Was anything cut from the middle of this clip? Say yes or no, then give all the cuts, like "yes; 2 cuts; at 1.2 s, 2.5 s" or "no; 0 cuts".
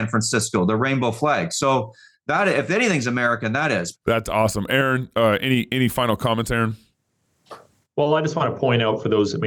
yes; 1 cut; at 3.9 s